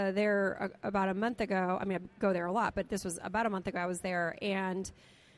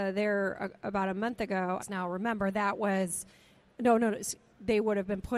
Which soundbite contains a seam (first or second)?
second